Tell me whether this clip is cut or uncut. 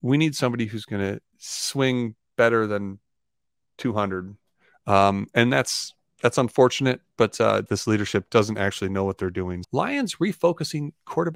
cut